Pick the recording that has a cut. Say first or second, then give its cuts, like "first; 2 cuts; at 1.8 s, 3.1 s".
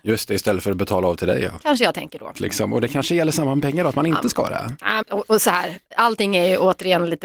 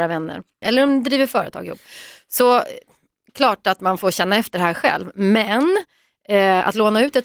first; 2 cuts; at 2.3 s, 5.0 s